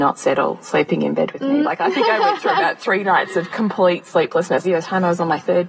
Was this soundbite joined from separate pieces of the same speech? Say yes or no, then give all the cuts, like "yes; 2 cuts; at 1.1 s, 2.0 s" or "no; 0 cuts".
yes; 2 cuts; at 1.6 s, 4.6 s